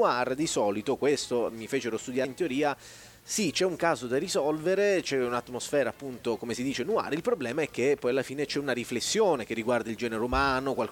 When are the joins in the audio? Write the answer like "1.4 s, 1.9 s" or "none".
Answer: 2.2 s